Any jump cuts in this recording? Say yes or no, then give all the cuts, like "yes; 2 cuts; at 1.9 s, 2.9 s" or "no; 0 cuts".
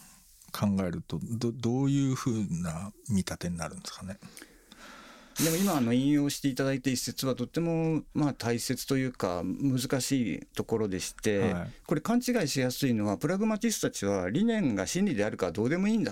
yes; 1 cut; at 5.3 s